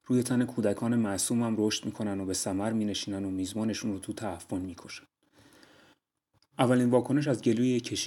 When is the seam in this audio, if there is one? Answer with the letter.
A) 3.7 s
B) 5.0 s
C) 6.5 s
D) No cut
C